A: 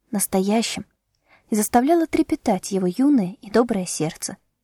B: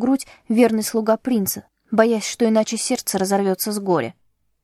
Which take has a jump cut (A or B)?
B